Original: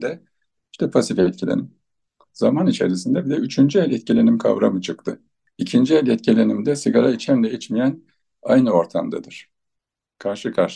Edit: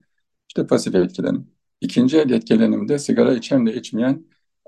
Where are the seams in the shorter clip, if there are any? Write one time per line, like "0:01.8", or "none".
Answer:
0:01.7